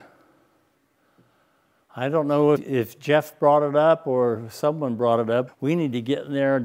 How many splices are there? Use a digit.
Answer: 2